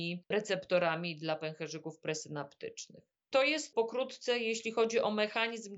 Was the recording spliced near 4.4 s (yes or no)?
no